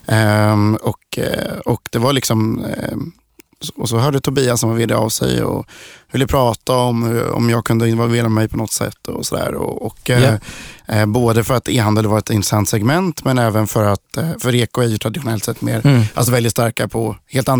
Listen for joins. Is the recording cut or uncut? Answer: uncut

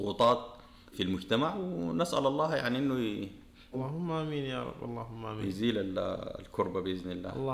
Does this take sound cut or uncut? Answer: cut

